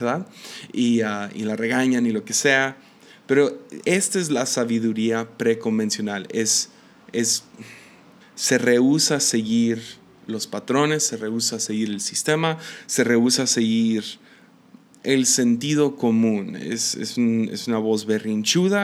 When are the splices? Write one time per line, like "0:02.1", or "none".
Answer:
0:03.8
0:08.2

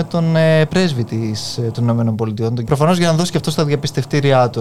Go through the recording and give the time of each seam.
0:02.6

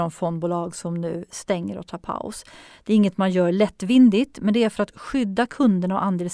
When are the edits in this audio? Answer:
none

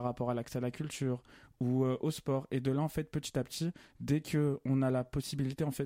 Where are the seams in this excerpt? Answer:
none

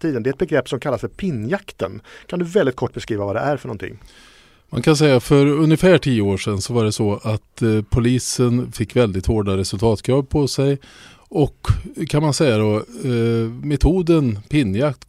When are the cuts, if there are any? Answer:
none

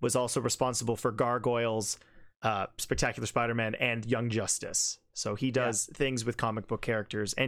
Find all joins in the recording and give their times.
0:02.4

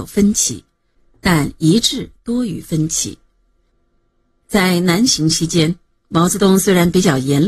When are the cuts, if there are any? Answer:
none

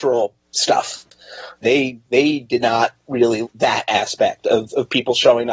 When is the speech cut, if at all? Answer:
0:01.6
0:03.4

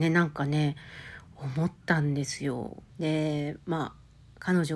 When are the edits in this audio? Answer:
0:02.9

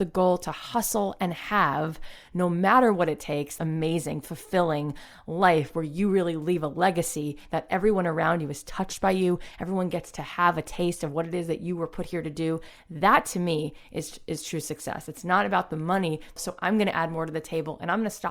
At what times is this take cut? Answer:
0:03.6
0:16.4

